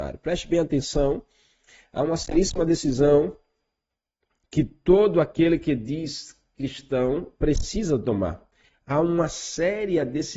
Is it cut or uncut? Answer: uncut